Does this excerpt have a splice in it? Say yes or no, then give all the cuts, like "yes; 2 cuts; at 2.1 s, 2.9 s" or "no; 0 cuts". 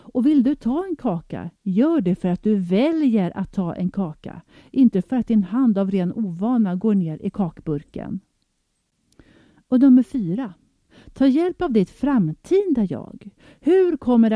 no; 0 cuts